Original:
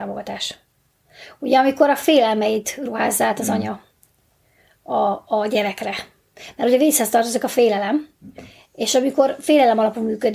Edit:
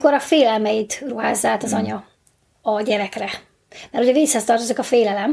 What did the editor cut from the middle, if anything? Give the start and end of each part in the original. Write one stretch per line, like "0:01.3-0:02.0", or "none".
0:04.4-0:05.3